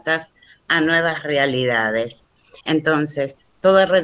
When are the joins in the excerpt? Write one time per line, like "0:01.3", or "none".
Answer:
0:02.6